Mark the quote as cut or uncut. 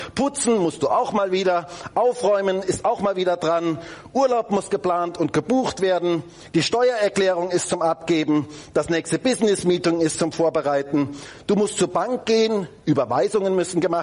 cut